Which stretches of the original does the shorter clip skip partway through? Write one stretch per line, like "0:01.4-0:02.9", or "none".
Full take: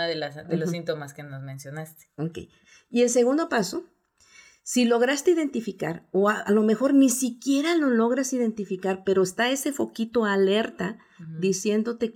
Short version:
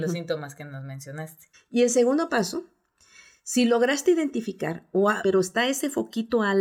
0:02.1-0:02.7
0:06.4-0:09.0

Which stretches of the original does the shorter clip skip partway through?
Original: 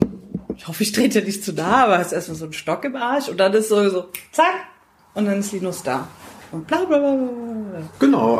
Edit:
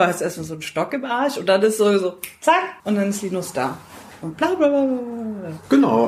0:04.7-0:05.1

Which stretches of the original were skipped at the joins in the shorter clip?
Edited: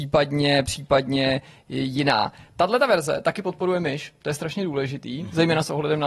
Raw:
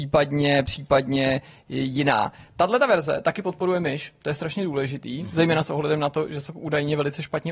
none

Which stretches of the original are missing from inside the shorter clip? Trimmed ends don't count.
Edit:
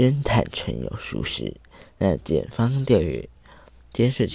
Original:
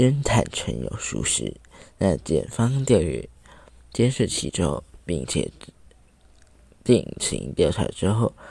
none

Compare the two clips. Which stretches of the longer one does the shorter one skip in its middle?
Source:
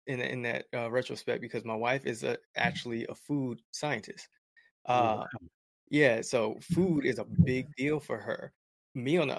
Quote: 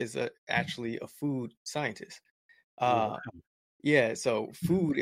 none

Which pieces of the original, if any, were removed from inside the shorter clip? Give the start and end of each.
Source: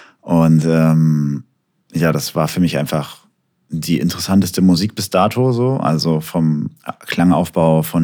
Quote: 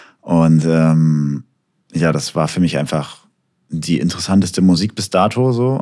none

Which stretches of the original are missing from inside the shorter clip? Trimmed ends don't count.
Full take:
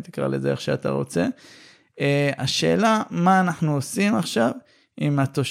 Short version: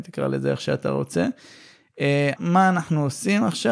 0:02.4-0:03.1

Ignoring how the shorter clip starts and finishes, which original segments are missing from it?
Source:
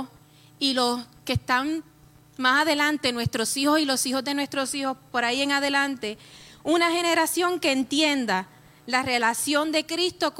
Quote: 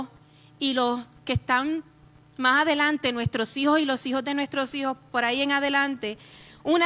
none

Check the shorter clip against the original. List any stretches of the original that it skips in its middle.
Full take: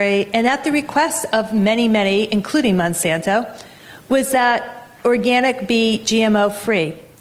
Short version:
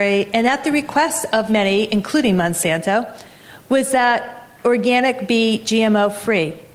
0:01.5-0:01.9

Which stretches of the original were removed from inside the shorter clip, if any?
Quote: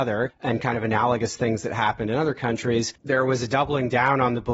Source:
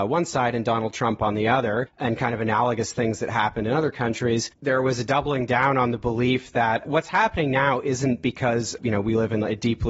none

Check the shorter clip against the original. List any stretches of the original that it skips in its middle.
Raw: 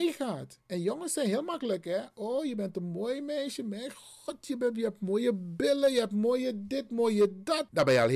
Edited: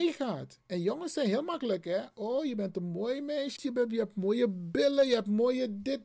0:03.6-0:04.4

